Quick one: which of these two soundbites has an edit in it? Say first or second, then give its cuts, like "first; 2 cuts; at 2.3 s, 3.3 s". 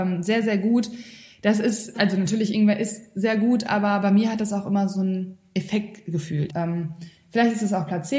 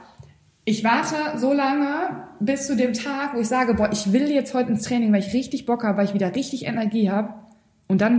first; 2 cuts; at 1.9 s, 6.5 s